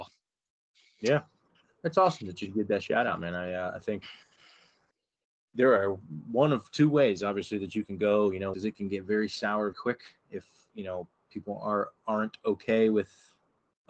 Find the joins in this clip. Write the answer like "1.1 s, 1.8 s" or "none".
8.5 s, 9.7 s